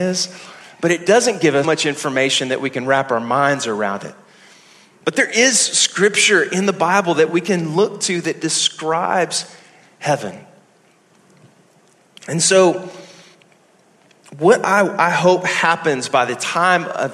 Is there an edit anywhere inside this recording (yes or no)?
yes